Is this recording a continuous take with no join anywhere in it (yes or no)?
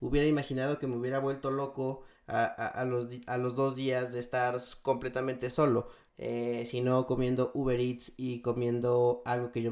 no